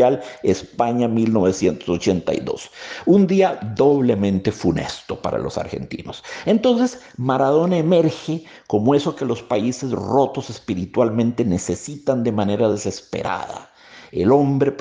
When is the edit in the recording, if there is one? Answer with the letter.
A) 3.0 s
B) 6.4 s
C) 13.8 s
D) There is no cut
D